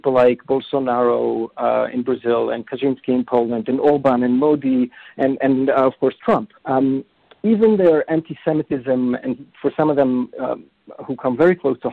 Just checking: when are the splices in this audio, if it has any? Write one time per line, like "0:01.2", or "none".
0:06.6